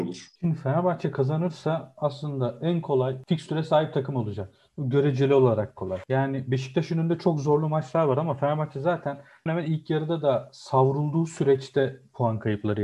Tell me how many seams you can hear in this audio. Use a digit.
1